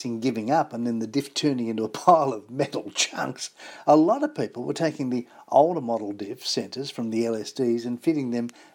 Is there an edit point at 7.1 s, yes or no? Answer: no